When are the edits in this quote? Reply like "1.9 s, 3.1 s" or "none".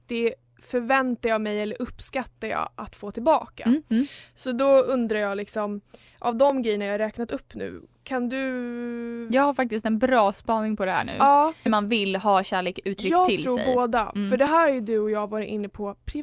11.7 s